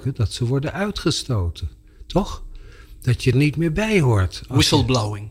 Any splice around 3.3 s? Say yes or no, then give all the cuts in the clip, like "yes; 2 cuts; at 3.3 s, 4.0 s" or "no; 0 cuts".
yes; 1 cut; at 3.3 s